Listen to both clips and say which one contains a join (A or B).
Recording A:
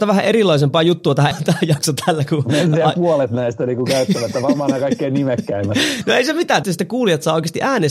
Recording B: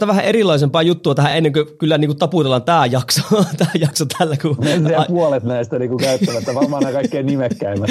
A